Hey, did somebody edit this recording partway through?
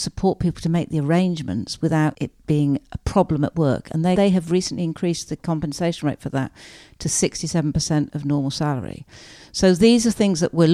yes; 1 cut; at 4.2 s

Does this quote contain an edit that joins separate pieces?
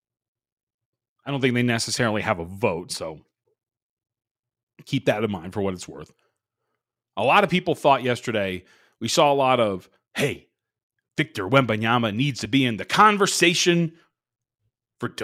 no; 0 cuts

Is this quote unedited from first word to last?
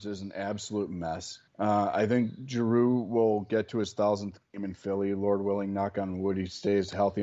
no; 1 cut; at 1.5 s

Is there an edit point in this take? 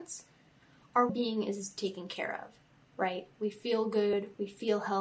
yes; 1 cut; at 1.1 s

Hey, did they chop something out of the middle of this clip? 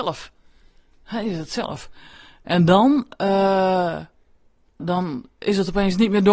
yes; 1 cut; at 4.8 s

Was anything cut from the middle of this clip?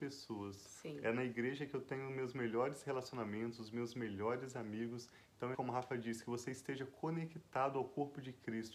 yes; 1 cut; at 5.5 s

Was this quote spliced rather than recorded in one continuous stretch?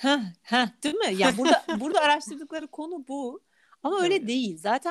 no; 0 cuts

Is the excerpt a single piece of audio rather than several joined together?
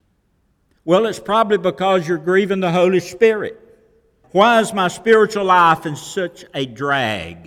no; 1 cut; at 4.2 s

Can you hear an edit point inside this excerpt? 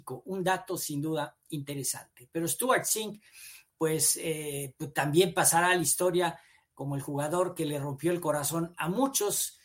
no; 0 cuts

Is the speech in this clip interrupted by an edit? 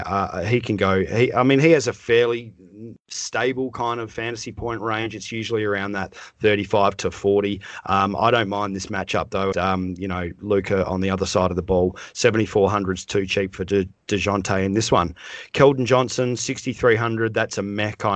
yes; 1 cut; at 9.5 s

